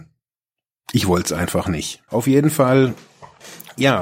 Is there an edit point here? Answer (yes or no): yes